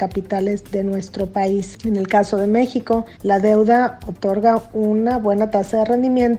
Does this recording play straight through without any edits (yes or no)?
no